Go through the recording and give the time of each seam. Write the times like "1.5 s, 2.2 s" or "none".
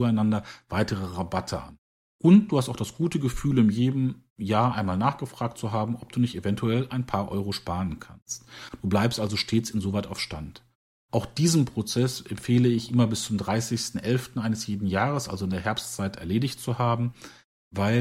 2.0 s